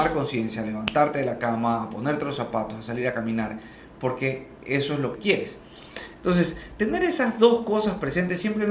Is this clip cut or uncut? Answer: cut